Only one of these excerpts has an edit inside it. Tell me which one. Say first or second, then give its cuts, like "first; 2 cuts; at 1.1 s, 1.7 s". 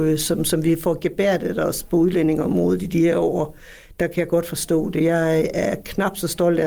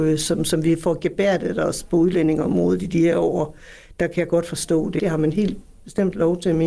second; 1 cut; at 5.0 s